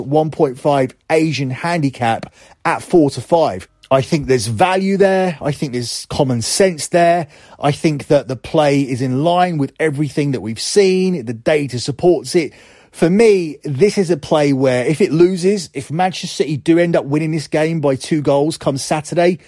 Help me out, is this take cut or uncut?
uncut